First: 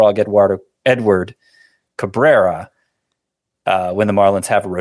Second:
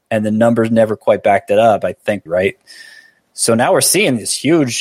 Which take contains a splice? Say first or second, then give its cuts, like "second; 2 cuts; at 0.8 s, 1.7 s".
second; 1 cut; at 2.3 s